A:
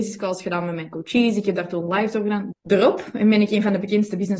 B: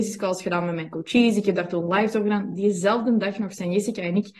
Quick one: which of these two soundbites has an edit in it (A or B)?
A